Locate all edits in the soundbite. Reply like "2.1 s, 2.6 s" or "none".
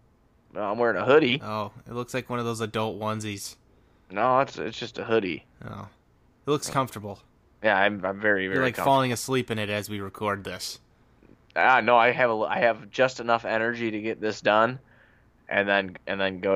none